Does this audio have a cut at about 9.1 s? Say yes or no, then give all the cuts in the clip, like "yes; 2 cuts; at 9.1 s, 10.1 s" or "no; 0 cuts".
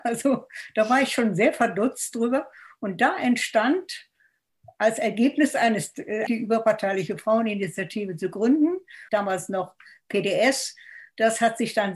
yes; 2 cuts; at 6.3 s, 9.1 s